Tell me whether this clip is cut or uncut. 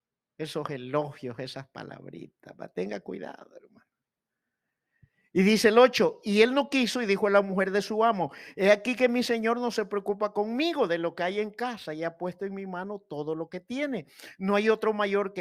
uncut